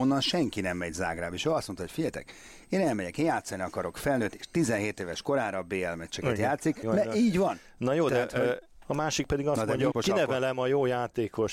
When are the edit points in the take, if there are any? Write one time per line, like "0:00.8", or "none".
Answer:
0:06.8
0:08.8
0:09.9